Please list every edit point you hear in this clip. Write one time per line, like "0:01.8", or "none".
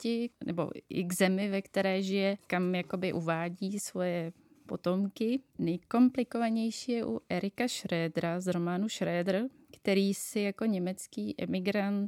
none